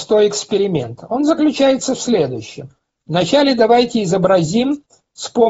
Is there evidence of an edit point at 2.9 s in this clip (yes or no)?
no